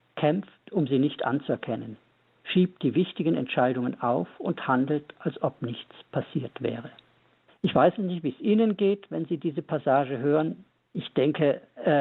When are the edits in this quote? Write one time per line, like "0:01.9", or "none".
0:07.5
0:10.8